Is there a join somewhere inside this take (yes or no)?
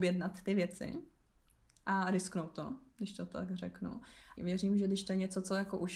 yes